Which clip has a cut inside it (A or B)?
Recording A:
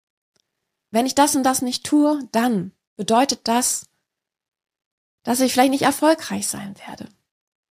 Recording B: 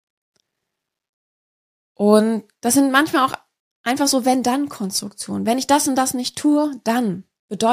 A